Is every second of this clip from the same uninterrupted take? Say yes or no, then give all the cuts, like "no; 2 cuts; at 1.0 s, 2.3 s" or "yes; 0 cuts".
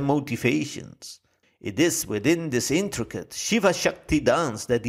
no; 1 cut; at 1.4 s